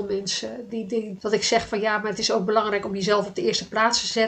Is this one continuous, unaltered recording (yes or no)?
no